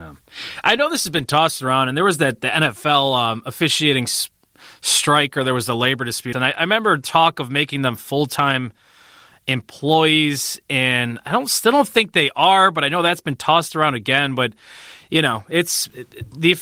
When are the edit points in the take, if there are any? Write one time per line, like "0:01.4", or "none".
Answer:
0:06.3

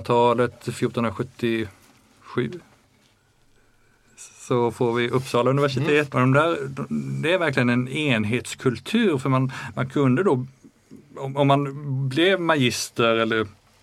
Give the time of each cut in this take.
0:06.1

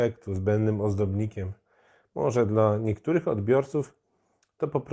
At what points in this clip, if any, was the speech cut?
none

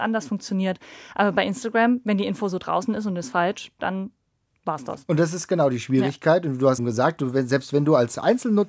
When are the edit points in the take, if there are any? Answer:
0:06.8

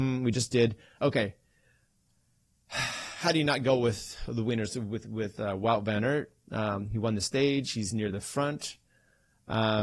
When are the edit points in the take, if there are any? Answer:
0:01.0

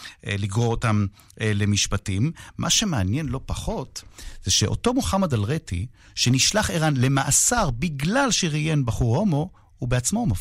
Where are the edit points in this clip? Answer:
none

